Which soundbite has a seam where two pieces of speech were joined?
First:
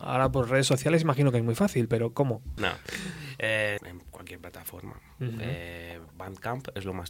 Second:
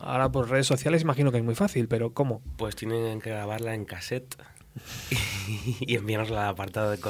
first; 2 cuts; at 2.6 s, 3.8 s

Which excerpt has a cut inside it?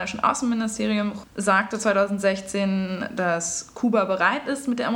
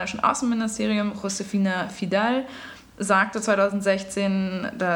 first; 1 cut; at 1.2 s

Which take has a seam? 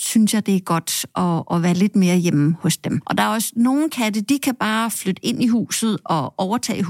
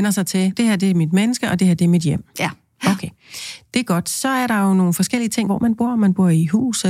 second; 1 cut; at 5.5 s

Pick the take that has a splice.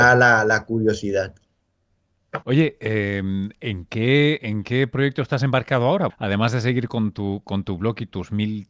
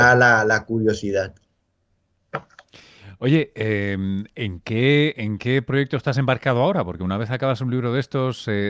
first; 2 cuts; at 2.4 s, 6.1 s

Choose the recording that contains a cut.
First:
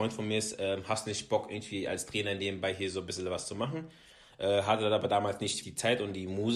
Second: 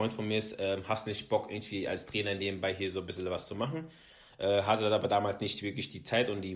first; 1 cut; at 5.6 s

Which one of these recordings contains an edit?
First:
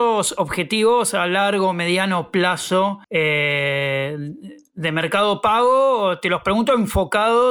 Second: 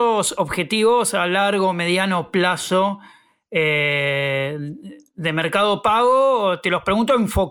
first; 1 cut; at 3.0 s

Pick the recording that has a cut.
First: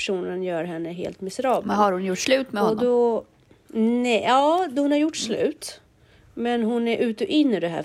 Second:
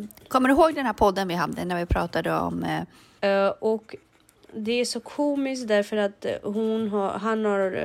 second; 1 cut; at 3.2 s

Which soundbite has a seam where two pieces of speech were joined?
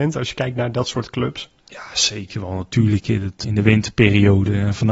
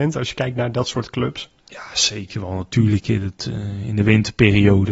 first; 1 cut; at 3.4 s

